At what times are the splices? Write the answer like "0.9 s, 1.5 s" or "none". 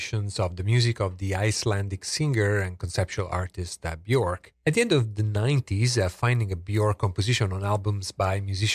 4.5 s

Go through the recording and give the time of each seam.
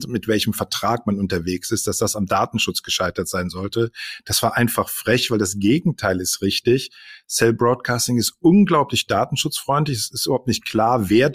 none

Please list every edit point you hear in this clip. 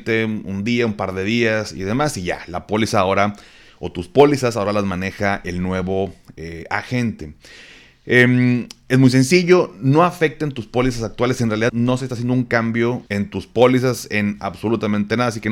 11.7 s, 13.1 s

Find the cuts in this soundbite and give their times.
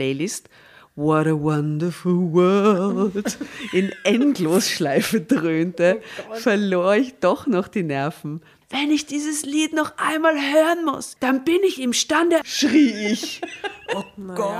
8.6 s, 11.2 s, 12.4 s

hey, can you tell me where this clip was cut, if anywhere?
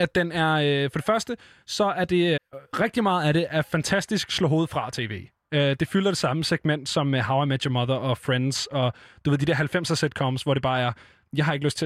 2.4 s

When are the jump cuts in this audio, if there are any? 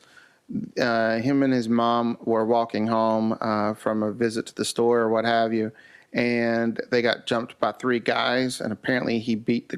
none

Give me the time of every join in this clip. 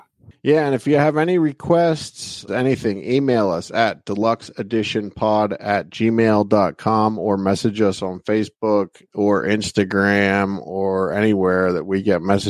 2.5 s, 9.1 s

